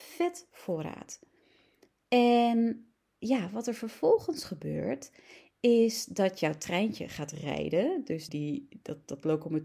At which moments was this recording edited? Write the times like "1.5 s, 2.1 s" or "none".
8.3 s